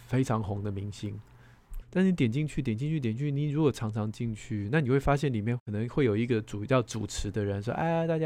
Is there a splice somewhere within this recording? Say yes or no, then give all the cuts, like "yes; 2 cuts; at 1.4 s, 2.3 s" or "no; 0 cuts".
yes; 1 cut; at 1.8 s